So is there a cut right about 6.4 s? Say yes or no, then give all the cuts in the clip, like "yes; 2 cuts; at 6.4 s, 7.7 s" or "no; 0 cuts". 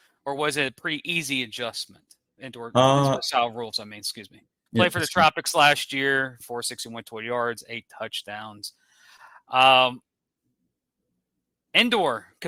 yes; 2 cuts; at 4.7 s, 6.4 s